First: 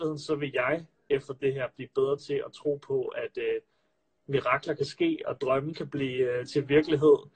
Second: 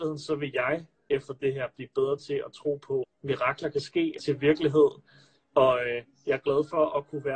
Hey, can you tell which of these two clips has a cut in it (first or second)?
second